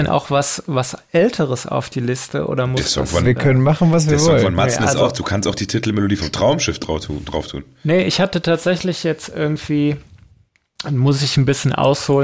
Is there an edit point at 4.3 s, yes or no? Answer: no